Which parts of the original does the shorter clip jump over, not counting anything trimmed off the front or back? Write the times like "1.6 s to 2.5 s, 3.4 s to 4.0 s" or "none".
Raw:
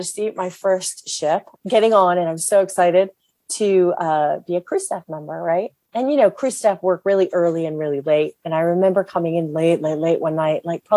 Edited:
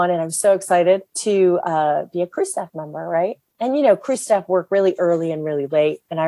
3.2 s to 3.4 s